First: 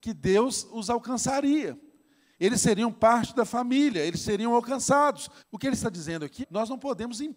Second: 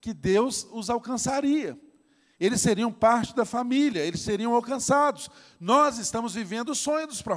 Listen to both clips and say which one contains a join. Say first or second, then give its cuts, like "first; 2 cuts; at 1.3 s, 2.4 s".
first; 2 cuts; at 5.4 s, 6.4 s